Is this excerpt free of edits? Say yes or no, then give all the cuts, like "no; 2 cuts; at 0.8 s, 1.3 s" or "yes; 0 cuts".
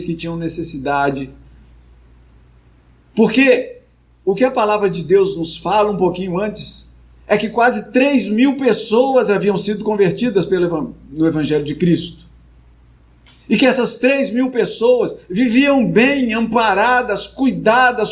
yes; 0 cuts